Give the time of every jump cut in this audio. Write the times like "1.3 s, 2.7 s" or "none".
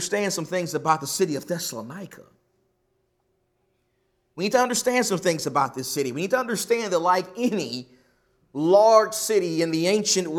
none